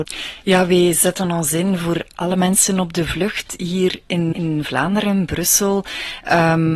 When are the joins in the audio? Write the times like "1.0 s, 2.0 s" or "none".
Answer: 4.3 s